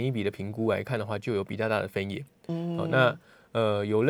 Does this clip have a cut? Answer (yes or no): no